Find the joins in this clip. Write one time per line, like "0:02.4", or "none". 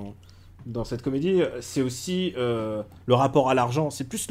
none